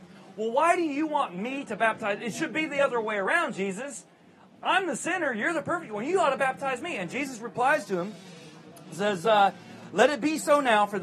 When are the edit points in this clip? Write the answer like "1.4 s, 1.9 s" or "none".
none